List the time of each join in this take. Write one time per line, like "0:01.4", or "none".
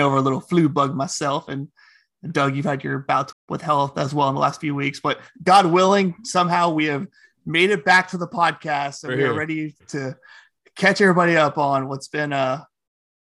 0:03.3